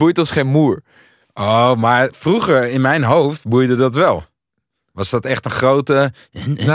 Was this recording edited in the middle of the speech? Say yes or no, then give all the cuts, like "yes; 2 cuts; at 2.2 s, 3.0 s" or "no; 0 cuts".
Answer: no; 0 cuts